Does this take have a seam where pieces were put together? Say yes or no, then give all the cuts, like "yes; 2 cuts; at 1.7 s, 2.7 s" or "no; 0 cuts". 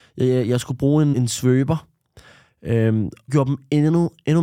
yes; 2 cuts; at 1.1 s, 3.3 s